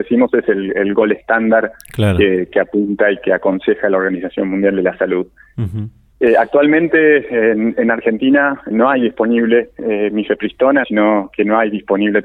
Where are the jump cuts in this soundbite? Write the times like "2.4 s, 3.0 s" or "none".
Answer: 8.7 s, 10.8 s

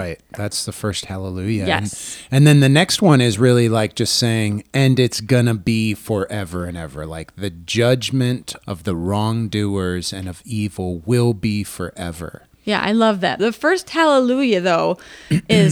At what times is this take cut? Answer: 13.4 s

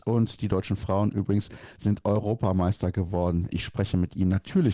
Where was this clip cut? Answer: none

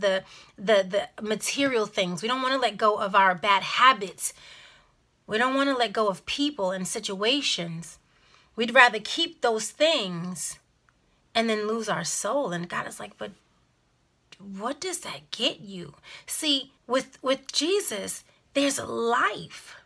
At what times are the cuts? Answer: 16.8 s

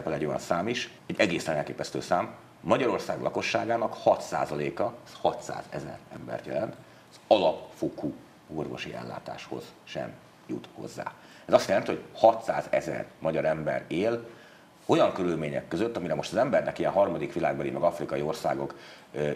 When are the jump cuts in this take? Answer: 1.0 s

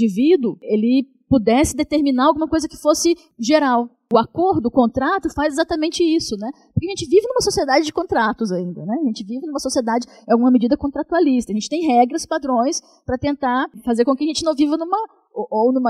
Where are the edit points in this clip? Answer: none

